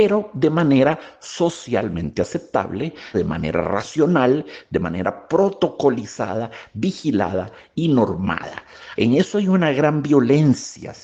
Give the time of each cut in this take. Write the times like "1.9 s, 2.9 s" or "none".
3.1 s, 9.0 s